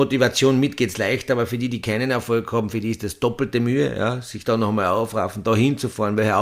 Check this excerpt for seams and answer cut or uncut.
uncut